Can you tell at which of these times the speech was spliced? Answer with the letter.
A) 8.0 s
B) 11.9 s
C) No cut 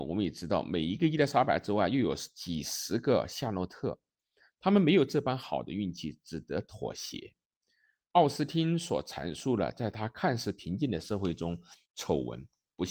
B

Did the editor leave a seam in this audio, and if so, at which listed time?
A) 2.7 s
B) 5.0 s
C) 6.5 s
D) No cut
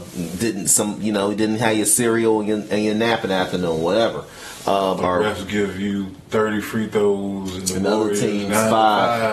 B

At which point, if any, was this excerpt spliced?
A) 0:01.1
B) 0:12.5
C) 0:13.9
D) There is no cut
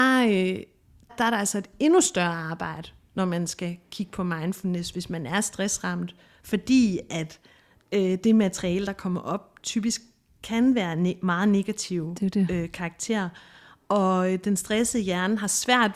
A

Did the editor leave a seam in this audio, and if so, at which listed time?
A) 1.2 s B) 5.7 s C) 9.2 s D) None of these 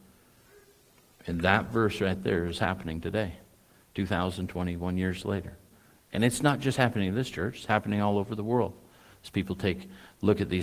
D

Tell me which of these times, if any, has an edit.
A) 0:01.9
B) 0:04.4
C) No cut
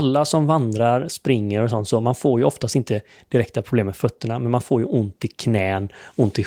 C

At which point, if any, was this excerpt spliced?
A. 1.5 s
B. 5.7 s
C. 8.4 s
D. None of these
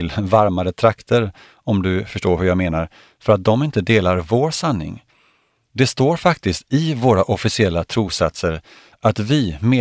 B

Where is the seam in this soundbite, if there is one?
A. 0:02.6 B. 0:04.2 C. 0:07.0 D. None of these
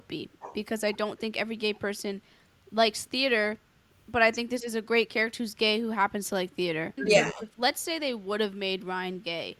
C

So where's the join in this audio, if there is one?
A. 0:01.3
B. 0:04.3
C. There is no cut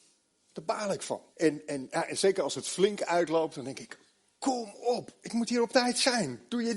A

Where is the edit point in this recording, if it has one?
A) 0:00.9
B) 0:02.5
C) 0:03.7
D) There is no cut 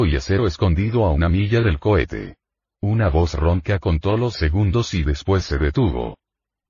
D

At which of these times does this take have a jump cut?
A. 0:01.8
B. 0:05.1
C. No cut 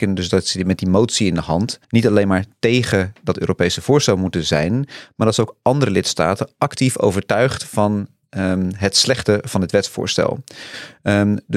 A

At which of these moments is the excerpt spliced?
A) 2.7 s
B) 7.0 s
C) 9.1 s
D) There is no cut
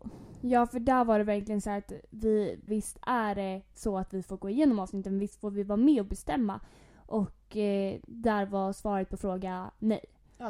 A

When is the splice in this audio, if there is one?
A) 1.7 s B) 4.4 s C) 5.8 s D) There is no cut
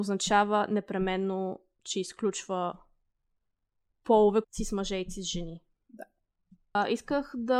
B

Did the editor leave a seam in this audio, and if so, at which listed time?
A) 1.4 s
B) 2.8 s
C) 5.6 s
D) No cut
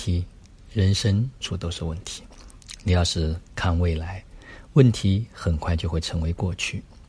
A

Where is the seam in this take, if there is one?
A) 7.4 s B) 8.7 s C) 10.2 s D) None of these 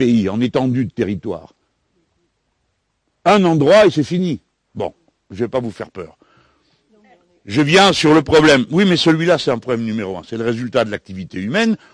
D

